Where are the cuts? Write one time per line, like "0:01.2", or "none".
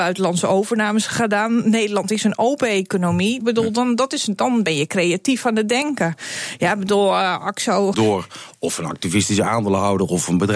0:03.4
0:07.9